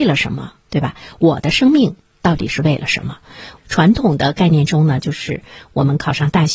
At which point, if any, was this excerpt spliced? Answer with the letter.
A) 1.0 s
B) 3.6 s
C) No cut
B